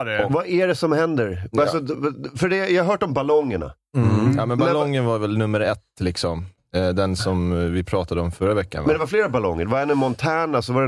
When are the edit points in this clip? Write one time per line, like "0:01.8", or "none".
none